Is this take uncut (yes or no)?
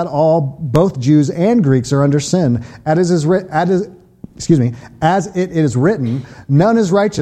yes